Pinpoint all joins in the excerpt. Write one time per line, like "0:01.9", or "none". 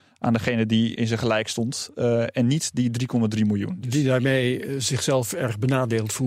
0:00.9